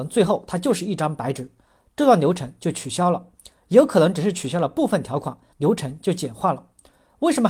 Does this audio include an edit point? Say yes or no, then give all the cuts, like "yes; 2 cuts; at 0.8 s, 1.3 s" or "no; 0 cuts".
yes; 1 cut; at 5.5 s